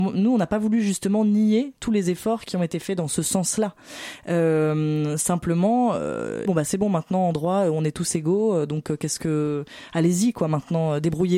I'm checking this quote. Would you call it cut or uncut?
cut